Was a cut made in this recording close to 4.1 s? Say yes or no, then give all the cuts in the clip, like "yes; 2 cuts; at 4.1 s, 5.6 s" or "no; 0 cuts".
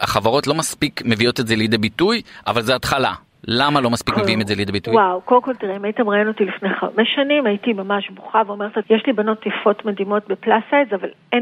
no; 1 cut; at 8.8 s